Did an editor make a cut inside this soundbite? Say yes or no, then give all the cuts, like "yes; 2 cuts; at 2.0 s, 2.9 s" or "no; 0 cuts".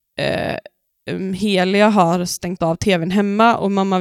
no; 0 cuts